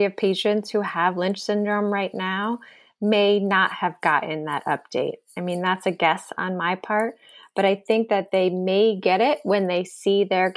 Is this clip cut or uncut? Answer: uncut